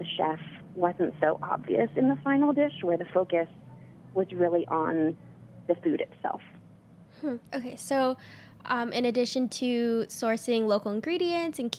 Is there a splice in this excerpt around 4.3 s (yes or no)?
no